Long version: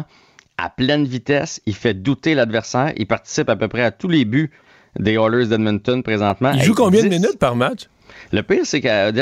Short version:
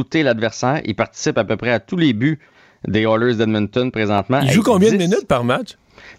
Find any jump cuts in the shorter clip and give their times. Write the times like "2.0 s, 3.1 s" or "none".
none